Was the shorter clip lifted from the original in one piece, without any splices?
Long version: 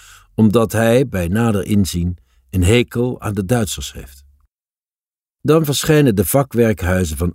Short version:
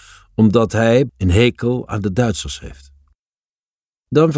no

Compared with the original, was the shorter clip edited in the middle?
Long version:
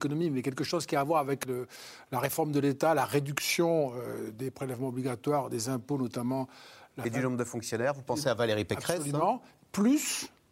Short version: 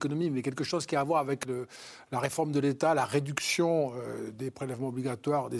no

